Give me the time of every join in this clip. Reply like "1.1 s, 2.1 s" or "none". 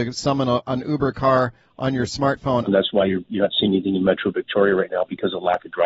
2.7 s